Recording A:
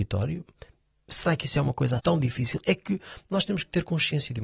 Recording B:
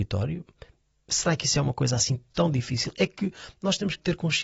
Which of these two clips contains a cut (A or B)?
A